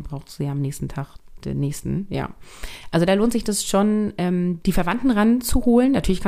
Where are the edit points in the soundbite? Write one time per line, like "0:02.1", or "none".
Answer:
0:04.6